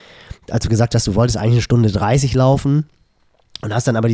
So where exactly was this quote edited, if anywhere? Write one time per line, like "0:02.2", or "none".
none